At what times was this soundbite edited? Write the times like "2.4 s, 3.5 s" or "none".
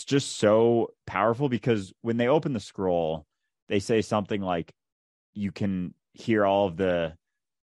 none